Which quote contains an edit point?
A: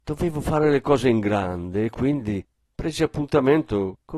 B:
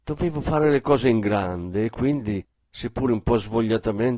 A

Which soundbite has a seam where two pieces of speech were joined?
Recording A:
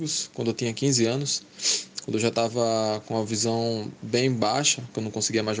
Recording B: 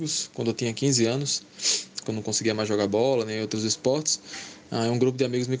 B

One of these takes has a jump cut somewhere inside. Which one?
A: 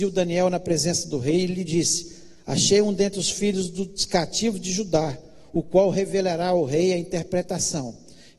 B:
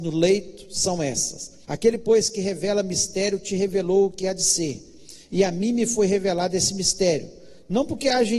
B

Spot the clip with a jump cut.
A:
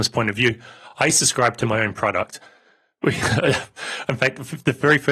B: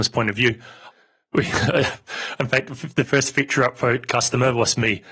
B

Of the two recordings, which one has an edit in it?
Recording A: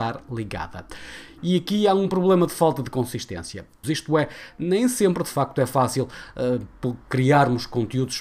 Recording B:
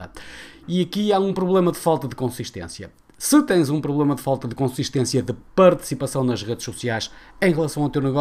A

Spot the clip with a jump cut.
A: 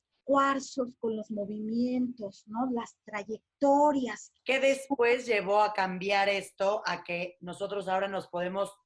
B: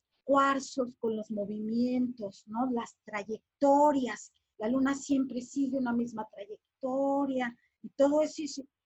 A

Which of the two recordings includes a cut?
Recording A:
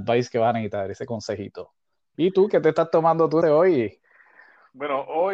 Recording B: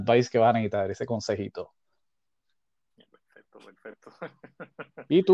A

